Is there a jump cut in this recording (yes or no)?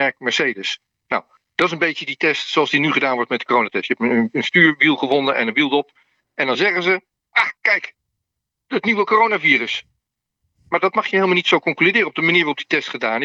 no